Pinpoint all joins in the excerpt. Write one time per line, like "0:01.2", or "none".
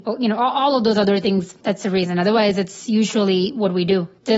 0:01.6